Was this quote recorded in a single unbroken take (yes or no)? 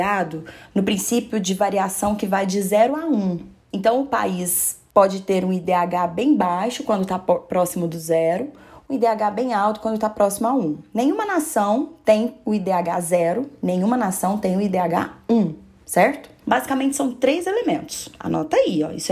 no